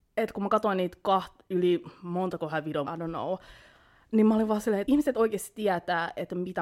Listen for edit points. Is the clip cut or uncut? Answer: cut